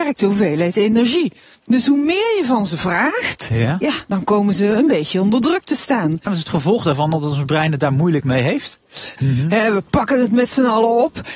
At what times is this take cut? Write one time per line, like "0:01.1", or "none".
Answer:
0:06.3
0:09.2

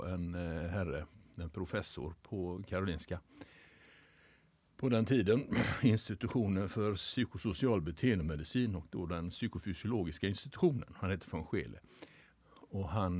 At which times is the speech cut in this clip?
none

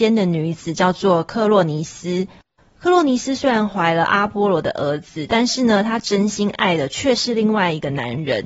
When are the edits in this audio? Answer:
none

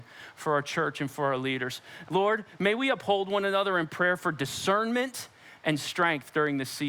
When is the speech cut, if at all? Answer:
0:02.0

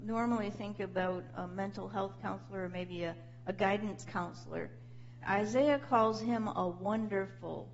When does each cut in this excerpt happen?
0:05.2

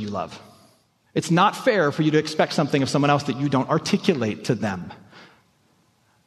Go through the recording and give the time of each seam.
0:01.0

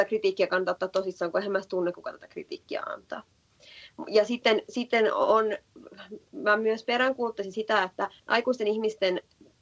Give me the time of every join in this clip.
0:08.2

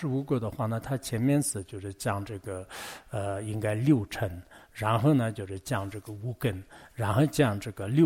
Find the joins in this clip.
none

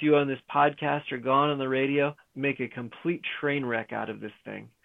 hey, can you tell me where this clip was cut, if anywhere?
0:02.3

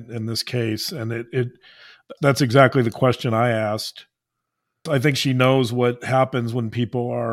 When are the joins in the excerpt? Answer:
0:02.2
0:04.9

